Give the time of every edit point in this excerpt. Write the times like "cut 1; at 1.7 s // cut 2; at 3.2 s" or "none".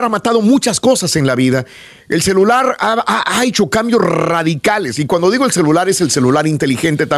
none